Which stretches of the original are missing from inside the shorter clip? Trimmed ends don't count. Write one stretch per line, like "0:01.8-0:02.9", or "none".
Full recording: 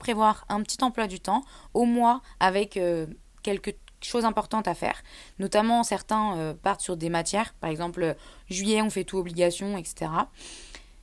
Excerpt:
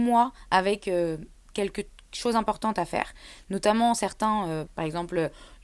0:06.5-0:07.5